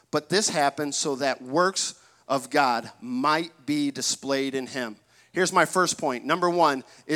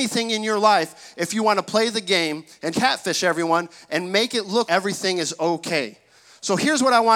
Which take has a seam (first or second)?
second